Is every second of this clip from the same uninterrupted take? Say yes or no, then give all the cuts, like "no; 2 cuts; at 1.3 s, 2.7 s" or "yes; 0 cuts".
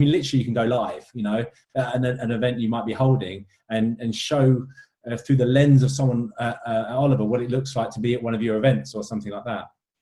yes; 0 cuts